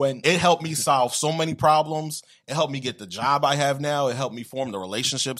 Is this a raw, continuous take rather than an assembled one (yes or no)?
yes